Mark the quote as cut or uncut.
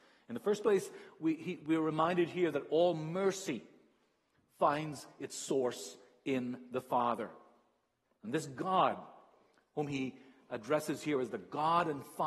cut